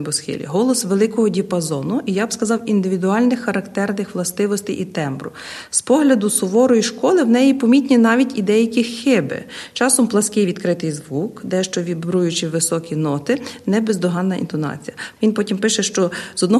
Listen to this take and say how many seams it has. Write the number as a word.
one